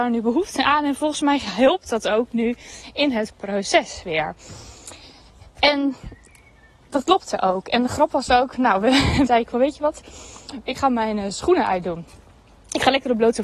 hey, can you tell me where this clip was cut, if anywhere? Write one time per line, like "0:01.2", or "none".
0:09.3